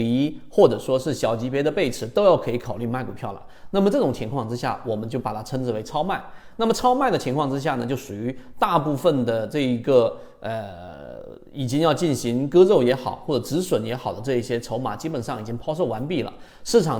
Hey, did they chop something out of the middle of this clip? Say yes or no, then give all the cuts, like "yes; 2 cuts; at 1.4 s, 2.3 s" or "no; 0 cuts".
yes; 2 cuts; at 3.6 s, 6.5 s